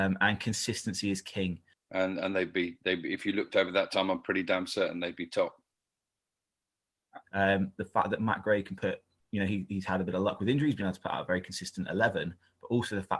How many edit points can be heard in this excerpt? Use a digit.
2